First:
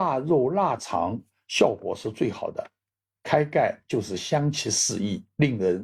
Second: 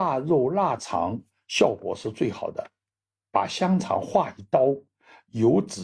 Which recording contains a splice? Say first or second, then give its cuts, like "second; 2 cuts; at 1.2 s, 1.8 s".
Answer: first; 1 cut; at 3.1 s